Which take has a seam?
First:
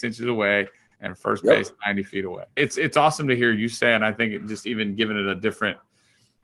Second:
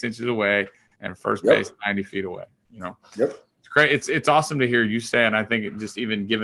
first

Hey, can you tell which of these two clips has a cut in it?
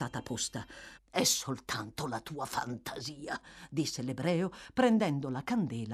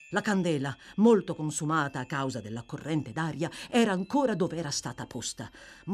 first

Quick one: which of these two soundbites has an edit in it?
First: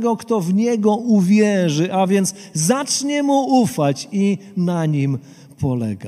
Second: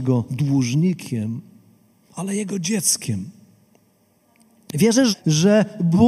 second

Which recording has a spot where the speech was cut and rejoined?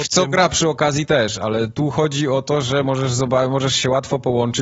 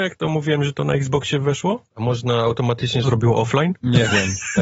second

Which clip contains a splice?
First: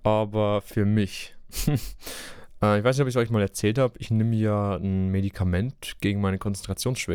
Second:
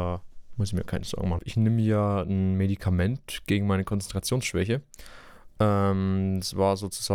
second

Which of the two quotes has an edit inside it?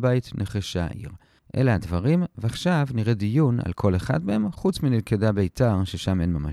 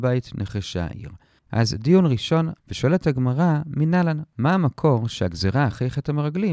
second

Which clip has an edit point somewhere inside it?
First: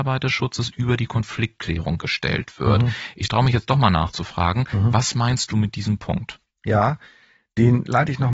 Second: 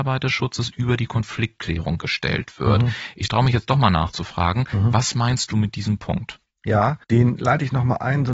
second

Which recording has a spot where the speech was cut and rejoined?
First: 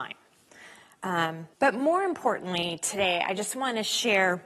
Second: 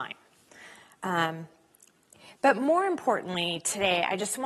first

